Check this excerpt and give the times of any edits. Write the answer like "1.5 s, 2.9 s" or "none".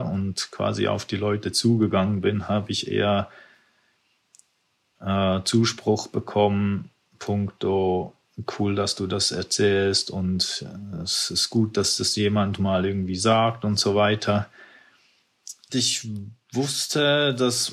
15.7 s